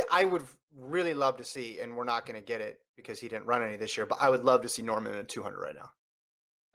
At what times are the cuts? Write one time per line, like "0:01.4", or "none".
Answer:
none